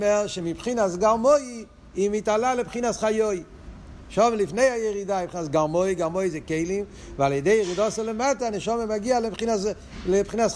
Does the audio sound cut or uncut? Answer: uncut